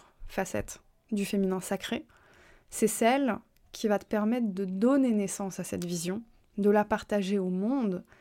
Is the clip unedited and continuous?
yes; 0 cuts

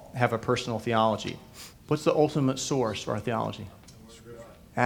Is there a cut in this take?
yes; 1 cut; at 1.7 s

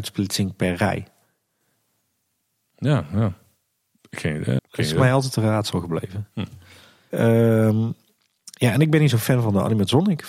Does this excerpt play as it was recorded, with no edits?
no; 2 cuts; at 4.6 s, 7.1 s

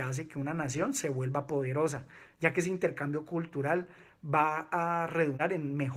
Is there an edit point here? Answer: no; 0 cuts

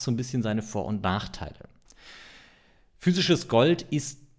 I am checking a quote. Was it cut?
no; 0 cuts

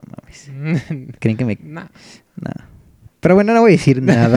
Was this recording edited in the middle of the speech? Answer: yes; 1 cut; at 1.6 s

